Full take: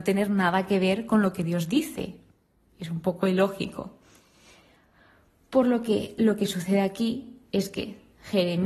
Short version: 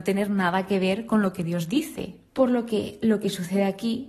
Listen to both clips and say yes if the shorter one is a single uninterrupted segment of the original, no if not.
no